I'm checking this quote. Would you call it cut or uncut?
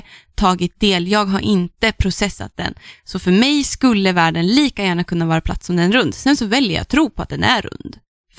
uncut